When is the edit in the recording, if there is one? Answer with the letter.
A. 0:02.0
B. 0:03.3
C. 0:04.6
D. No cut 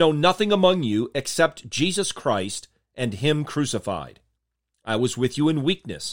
D